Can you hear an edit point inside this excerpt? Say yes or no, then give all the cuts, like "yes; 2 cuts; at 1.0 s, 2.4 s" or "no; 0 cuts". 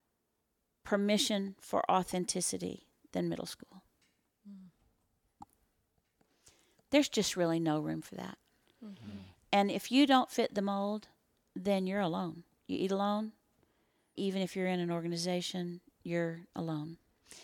yes; 1 cut; at 14.2 s